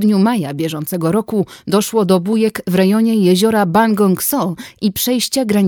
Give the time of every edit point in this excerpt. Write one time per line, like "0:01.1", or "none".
none